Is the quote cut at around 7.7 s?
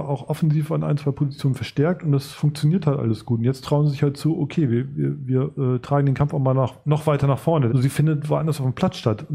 yes; 1 cut; at 7.7 s

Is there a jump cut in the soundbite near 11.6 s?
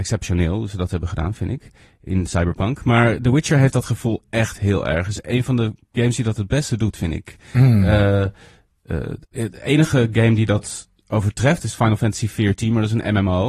yes; 2 cuts; at 9.3 s, 11.6 s

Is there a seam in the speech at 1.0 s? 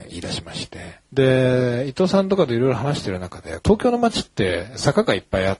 yes; 2 cuts; at 1.0 s, 3.6 s

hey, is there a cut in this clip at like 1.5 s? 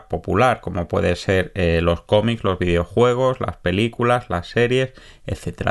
no; 0 cuts

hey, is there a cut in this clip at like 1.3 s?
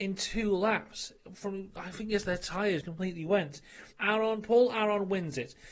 no; 2 cuts; at 2.8 s, 3.9 s

